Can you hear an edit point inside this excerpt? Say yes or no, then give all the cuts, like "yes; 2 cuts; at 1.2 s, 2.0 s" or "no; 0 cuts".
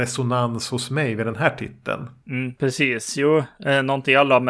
no; 0 cuts